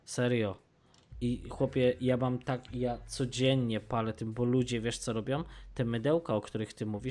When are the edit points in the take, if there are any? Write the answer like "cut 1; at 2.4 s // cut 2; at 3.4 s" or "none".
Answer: none